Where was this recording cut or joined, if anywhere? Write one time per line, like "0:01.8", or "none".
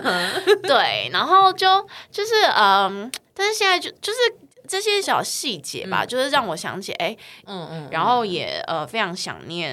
0:05.0
0:07.4